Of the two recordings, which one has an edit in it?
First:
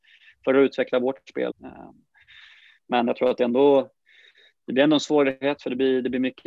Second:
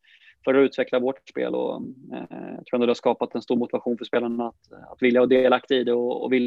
first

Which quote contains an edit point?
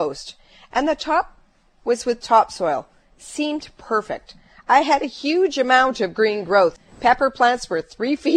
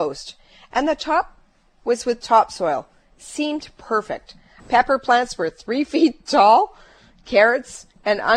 second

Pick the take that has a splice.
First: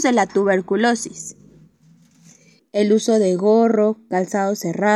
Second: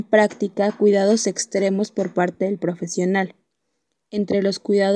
first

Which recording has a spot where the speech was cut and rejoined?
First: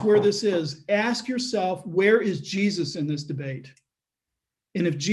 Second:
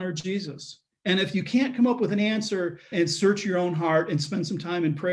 second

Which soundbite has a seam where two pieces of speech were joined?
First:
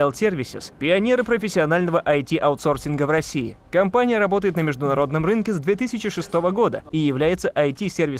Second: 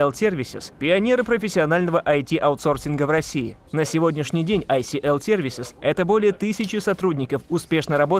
second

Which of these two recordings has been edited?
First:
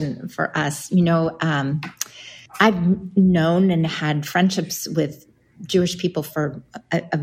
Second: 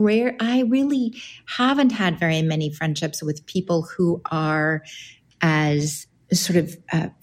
first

